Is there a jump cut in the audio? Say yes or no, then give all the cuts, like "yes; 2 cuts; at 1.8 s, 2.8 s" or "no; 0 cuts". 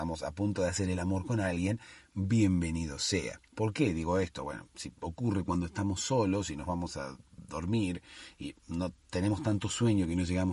yes; 2 cuts; at 3.5 s, 8.6 s